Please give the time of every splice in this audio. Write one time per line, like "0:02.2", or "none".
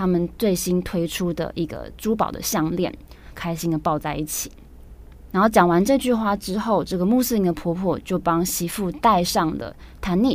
0:03.3
0:05.3